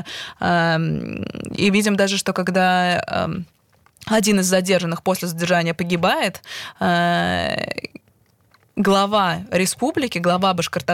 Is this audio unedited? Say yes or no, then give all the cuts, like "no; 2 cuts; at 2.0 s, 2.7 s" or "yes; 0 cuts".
yes; 0 cuts